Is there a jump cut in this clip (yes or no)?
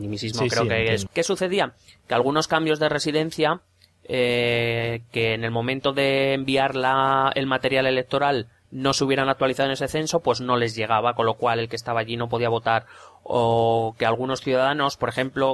yes